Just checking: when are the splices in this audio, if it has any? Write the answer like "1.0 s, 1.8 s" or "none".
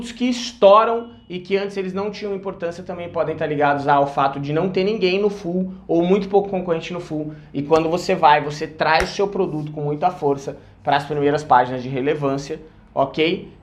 none